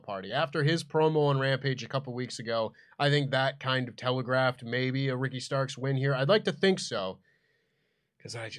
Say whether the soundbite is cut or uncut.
uncut